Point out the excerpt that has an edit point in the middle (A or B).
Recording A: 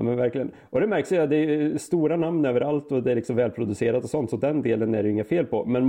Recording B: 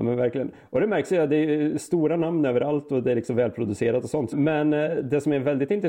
B